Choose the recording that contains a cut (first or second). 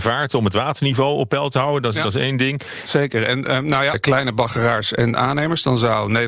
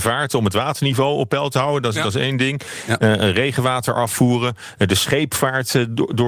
first